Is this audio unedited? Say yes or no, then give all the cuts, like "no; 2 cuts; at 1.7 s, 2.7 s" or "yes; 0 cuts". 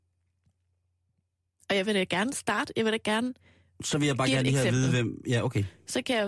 yes; 0 cuts